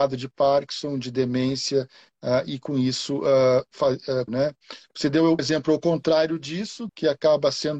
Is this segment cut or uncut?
cut